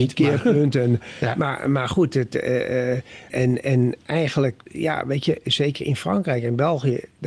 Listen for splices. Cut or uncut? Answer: cut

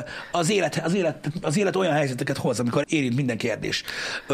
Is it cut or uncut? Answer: cut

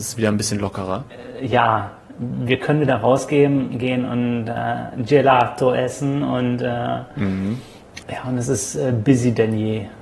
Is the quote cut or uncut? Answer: cut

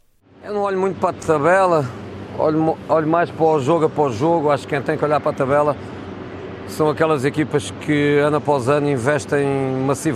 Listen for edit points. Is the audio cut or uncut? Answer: uncut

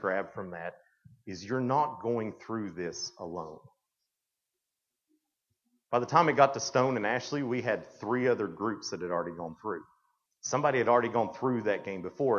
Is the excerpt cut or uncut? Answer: uncut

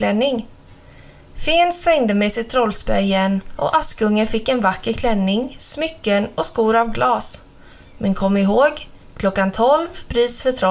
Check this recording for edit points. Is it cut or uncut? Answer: uncut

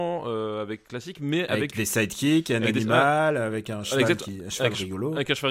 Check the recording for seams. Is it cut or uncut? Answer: uncut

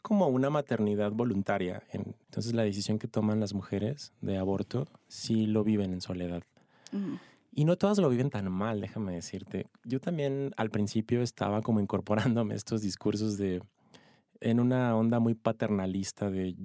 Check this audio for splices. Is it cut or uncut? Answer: uncut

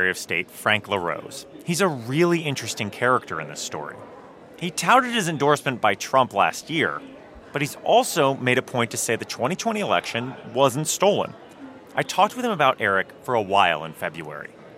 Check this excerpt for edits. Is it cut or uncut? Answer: uncut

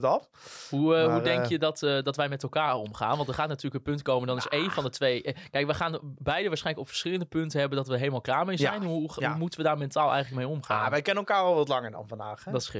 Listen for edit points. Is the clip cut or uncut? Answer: uncut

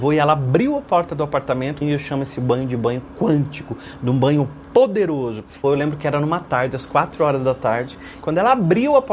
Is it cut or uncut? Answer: cut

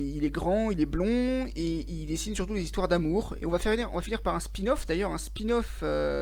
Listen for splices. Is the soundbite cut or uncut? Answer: cut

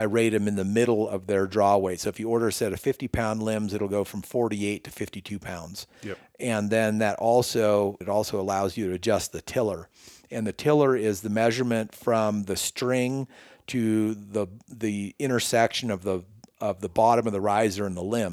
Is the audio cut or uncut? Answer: cut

